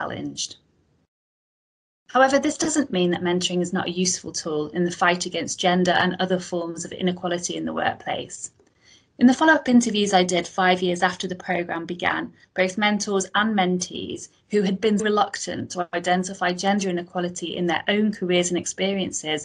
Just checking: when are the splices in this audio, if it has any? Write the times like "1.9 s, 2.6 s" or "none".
12.4 s, 15.0 s